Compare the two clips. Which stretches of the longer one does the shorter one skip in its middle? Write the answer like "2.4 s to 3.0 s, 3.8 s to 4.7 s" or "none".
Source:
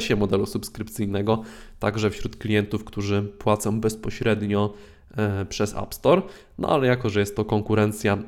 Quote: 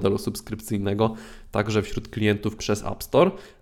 2.8 s to 5.5 s